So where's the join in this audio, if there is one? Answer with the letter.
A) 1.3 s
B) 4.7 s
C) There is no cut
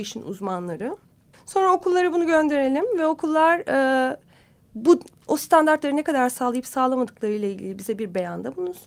A